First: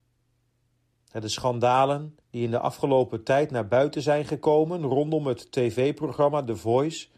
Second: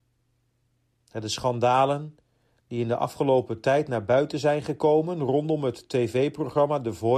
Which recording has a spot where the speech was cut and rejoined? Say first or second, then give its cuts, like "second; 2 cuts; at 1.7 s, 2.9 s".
first; 1 cut; at 2.2 s